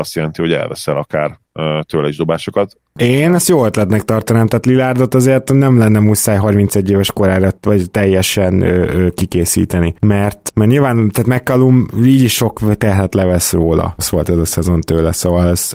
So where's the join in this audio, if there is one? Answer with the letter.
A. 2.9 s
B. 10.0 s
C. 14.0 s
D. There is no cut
C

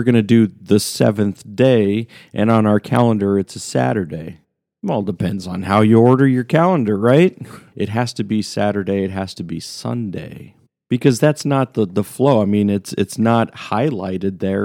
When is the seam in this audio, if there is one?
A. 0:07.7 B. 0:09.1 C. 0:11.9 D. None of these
A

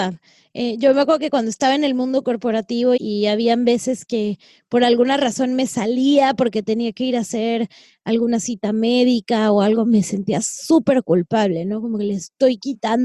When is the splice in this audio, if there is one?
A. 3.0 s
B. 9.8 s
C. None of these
A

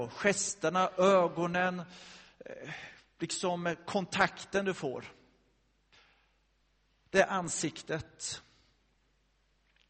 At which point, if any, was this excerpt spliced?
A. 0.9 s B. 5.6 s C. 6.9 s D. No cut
D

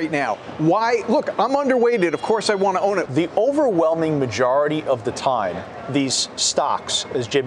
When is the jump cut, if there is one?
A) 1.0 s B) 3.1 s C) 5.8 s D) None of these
B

